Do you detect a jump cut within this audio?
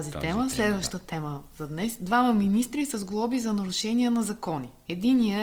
no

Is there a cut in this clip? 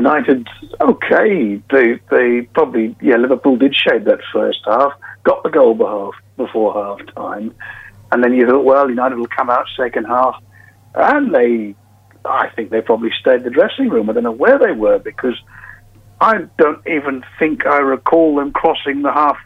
no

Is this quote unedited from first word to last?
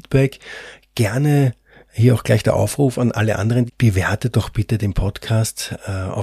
no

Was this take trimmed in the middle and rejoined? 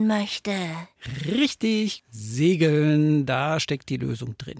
yes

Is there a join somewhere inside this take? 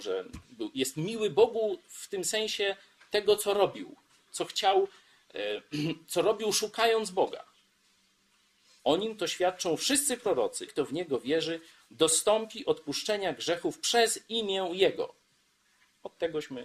yes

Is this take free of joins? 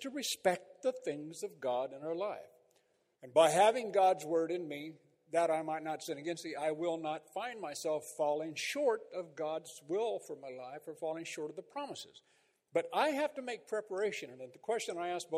no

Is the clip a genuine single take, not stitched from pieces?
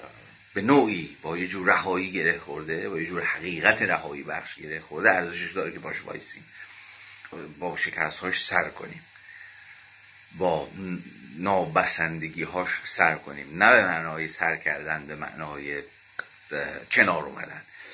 no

